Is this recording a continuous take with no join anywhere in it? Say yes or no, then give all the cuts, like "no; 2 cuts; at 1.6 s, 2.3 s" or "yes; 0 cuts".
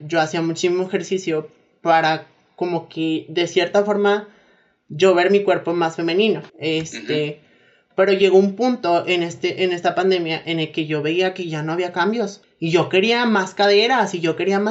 no; 2 cuts; at 6.5 s, 12.4 s